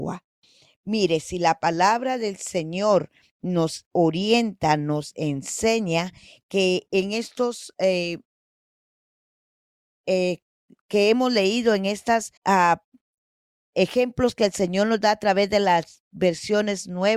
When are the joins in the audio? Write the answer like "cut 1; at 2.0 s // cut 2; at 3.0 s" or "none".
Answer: cut 1; at 12.4 s